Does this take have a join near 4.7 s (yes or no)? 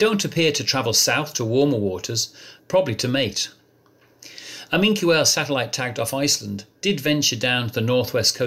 no